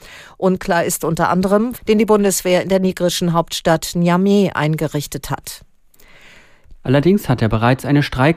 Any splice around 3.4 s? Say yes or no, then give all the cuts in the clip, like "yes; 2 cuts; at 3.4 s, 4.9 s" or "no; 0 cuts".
no; 2 cuts; at 1.8 s, 6.7 s